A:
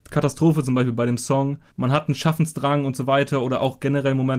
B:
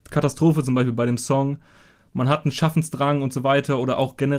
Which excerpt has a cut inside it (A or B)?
A